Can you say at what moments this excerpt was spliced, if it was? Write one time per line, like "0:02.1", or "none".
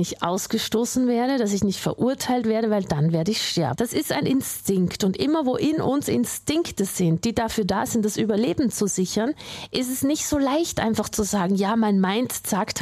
0:03.8